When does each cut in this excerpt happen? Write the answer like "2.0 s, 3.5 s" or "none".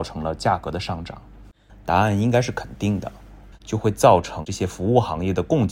1.7 s, 3.5 s